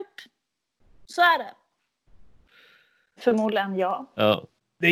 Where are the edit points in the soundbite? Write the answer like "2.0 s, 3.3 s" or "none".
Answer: 3.2 s